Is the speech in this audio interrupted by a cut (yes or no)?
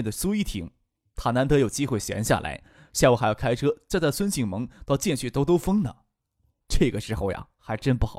yes